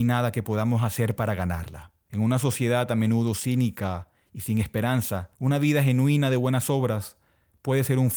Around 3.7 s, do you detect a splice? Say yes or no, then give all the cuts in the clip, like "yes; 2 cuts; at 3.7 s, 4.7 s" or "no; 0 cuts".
no; 2 cuts; at 2.1 s, 5.3 s